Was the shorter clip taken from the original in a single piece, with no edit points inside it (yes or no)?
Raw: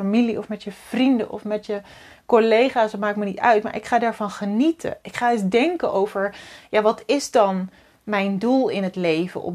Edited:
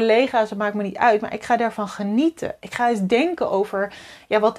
yes